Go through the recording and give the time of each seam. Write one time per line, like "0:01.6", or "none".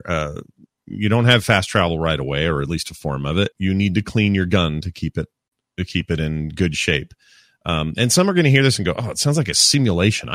0:03.5